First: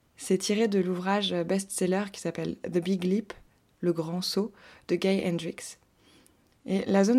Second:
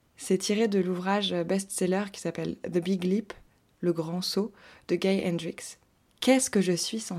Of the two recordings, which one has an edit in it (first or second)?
second